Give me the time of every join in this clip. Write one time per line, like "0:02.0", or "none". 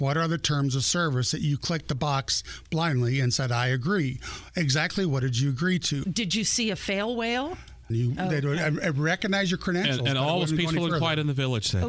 0:06.0
0:07.9